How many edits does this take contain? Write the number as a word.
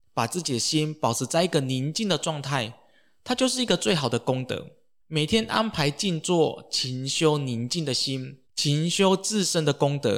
two